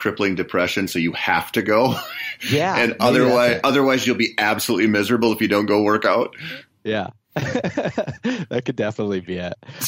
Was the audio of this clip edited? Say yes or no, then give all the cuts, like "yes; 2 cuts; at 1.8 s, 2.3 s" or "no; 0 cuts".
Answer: no; 0 cuts